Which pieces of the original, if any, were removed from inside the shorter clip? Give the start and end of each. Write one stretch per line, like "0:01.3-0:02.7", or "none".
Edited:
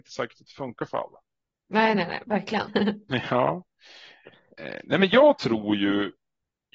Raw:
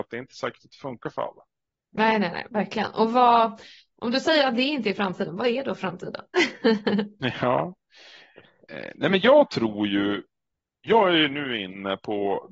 0:02.9-0:06.8